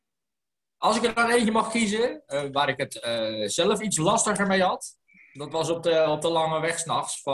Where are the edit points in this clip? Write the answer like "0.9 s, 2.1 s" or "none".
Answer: none